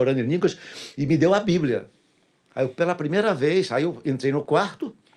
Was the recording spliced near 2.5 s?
no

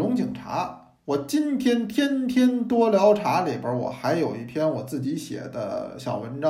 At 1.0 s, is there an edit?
no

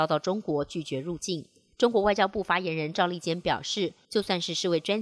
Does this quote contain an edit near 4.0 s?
yes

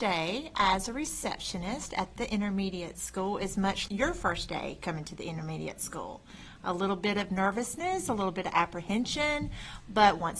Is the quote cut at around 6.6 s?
no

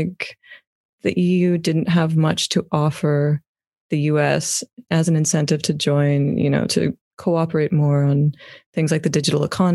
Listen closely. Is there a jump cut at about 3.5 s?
no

